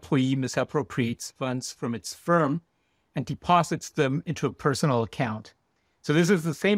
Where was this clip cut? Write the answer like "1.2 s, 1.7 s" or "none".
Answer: none